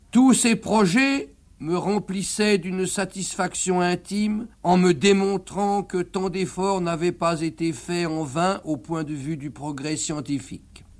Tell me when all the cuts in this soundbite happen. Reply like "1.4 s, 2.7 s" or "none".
1.4 s, 4.5 s